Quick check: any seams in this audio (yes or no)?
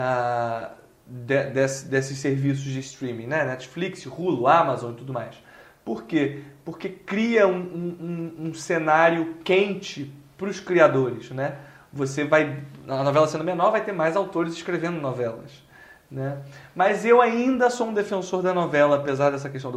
no